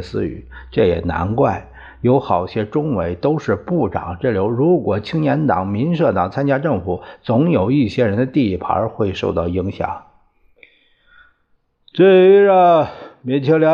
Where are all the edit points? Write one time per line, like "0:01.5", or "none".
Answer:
none